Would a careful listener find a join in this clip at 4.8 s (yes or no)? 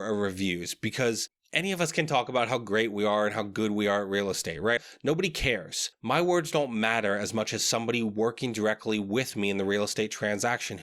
yes